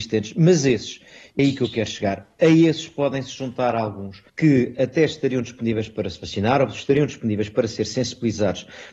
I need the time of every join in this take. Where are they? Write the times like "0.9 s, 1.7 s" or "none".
1.4 s, 4.3 s